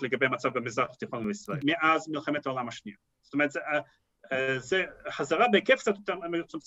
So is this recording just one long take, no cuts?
no; 1 cut; at 1.6 s

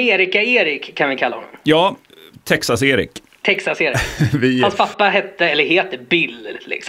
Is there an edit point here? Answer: no; 0 cuts

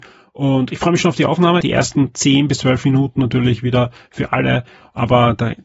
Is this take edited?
yes; 1 cut; at 1.6 s

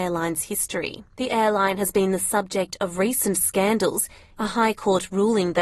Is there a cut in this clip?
yes; 2 cuts; at 1.1 s, 4.3 s

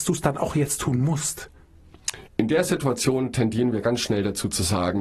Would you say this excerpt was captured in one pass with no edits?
no; 1 cut; at 2.3 s

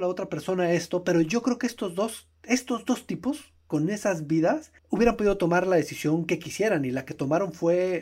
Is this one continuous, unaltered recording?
no; 1 cut; at 4.8 s

